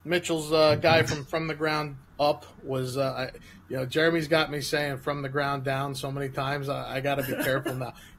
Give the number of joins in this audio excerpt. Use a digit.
0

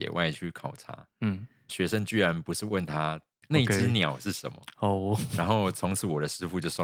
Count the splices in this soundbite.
2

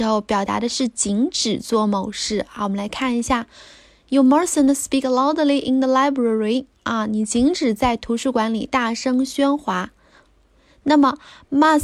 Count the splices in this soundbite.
0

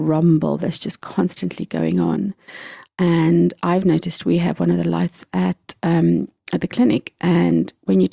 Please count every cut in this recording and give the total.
1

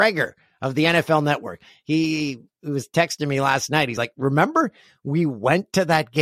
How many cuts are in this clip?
0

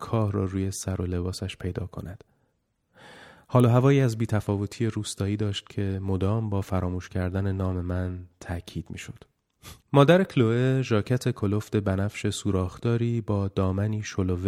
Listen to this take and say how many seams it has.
1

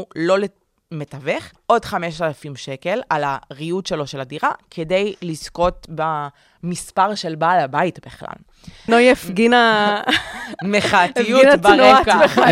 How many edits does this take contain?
2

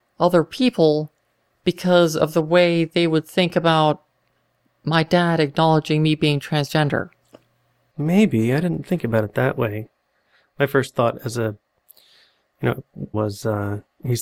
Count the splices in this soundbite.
1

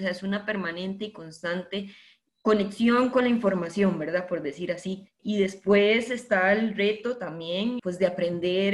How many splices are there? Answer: 0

